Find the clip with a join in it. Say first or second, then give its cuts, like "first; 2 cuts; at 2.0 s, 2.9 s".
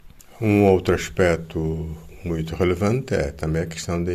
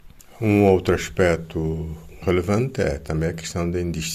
second; 1 cut; at 2.2 s